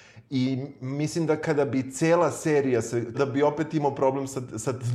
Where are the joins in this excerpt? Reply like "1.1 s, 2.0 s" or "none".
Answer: 3.1 s